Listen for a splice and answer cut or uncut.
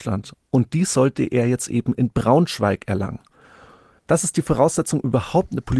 uncut